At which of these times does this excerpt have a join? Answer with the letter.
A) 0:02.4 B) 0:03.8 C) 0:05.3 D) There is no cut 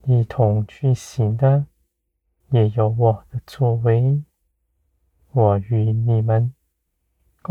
A